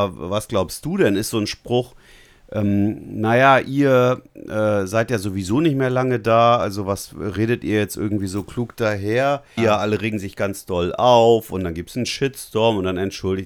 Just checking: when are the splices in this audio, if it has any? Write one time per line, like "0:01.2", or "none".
0:09.6